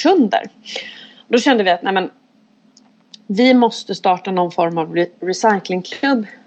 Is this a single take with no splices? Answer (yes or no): yes